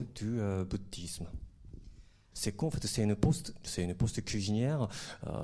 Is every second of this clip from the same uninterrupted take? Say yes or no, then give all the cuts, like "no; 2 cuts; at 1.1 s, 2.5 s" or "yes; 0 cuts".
no; 2 cuts; at 2.3 s, 3.7 s